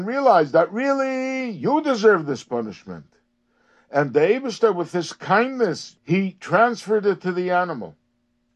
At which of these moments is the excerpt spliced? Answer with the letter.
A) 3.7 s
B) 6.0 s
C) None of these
B